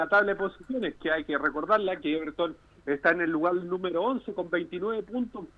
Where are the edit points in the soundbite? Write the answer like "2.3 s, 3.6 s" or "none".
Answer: none